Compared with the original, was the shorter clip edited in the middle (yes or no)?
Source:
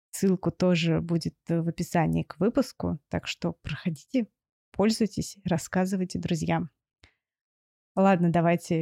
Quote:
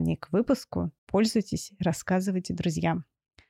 yes